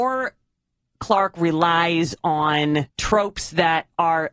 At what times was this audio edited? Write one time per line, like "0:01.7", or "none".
0:02.9